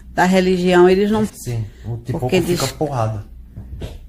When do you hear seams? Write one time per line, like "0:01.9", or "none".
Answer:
0:01.3

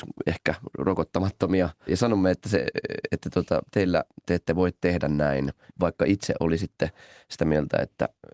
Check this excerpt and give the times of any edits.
0:01.9
0:05.7

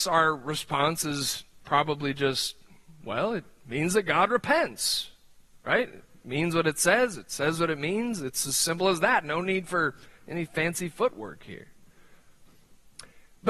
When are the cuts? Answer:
none

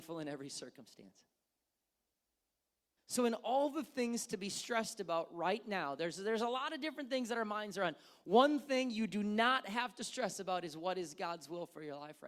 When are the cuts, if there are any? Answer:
0:03.0

